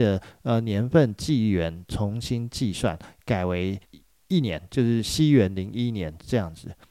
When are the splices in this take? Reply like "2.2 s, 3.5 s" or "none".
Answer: 3.8 s